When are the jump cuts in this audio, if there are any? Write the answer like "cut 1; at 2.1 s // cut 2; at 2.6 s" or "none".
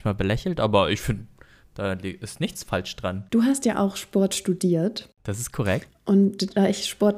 none